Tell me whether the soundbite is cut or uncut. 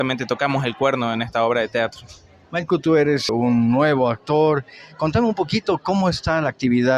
cut